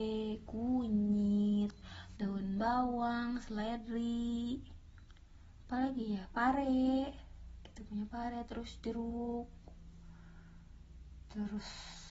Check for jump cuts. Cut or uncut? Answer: cut